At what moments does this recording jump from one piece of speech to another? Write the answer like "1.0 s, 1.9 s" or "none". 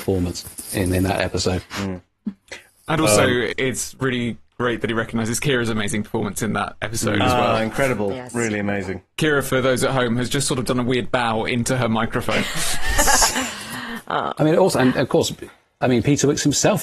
9.1 s